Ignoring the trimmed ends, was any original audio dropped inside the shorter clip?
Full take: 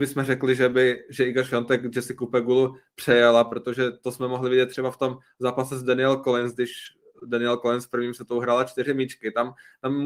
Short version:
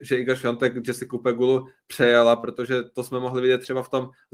no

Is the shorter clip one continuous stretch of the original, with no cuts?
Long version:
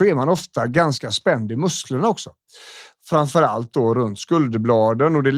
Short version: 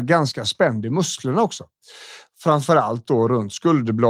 yes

